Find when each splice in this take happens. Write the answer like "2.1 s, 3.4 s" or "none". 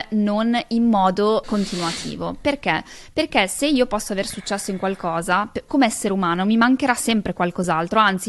1.4 s